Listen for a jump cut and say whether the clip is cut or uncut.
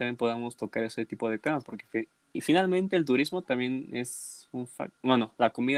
uncut